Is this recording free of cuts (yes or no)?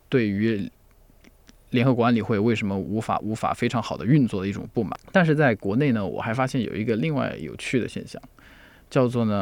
yes